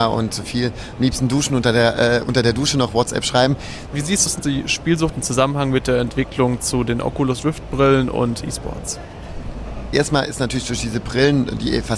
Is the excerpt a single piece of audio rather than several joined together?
no; 1 cut; at 3.9 s

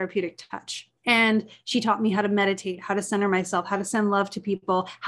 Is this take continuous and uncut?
no; 1 cut; at 1.0 s

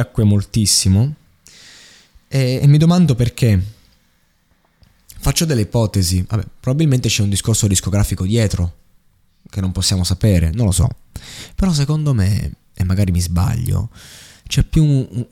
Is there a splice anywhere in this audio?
no; 0 cuts

